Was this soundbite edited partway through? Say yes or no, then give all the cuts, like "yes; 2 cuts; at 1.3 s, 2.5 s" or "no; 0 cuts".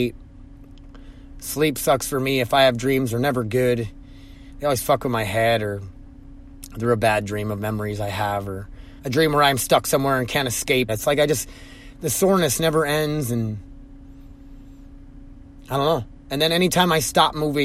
yes; 2 cuts; at 9.0 s, 10.9 s